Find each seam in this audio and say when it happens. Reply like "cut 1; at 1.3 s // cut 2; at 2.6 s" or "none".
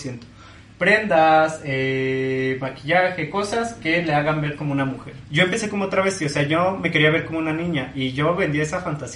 cut 1; at 5.2 s